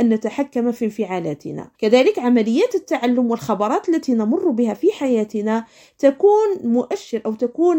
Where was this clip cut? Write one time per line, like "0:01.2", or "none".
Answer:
0:01.7

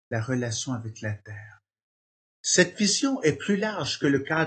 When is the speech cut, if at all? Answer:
0:02.3

